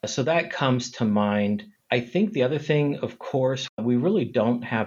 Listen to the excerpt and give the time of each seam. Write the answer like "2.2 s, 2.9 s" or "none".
3.7 s